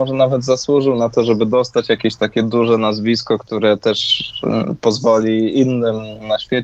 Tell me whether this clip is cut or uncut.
uncut